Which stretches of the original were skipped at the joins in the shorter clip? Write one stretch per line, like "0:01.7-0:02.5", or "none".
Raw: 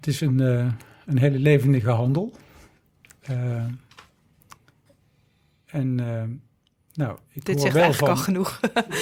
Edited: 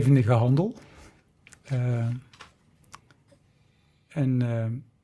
none